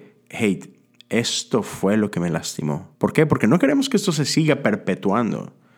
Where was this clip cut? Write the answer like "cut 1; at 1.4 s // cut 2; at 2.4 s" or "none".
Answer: cut 1; at 2.9 s